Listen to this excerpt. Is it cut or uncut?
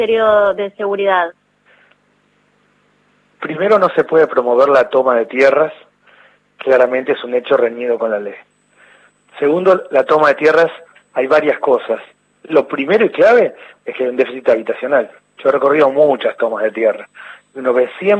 uncut